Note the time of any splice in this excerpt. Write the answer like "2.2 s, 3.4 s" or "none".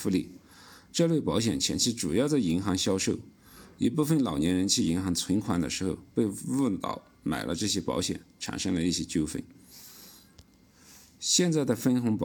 none